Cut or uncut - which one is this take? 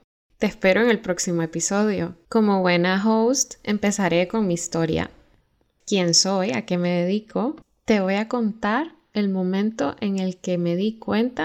uncut